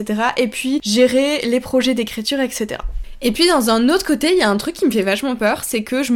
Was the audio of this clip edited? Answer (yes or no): no